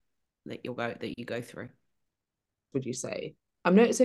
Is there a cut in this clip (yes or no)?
yes